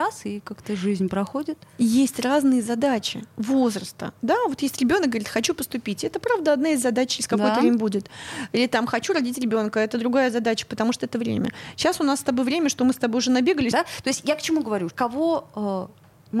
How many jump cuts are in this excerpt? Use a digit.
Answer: 2